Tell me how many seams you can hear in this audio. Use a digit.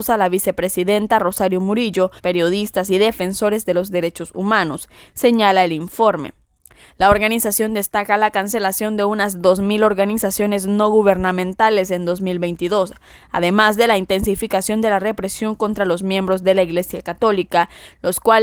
1